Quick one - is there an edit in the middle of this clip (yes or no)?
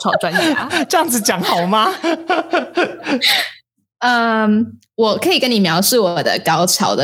no